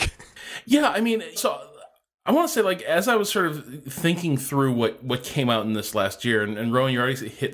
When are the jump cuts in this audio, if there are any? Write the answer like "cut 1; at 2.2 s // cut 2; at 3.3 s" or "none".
cut 1; at 1.4 s